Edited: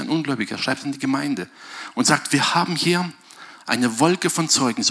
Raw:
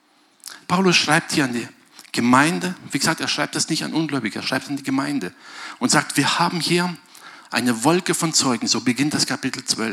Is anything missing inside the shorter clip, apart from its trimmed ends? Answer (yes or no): no